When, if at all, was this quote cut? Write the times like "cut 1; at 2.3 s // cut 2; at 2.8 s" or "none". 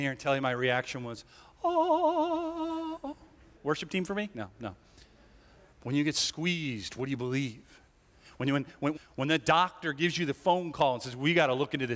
cut 1; at 3.5 s // cut 2; at 5.7 s // cut 3; at 8.9 s